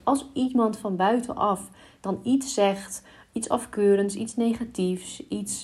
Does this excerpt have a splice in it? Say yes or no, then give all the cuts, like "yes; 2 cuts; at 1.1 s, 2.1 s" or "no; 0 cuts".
no; 0 cuts